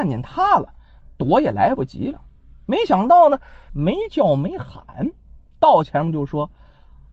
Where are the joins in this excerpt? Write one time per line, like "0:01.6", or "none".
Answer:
0:03.7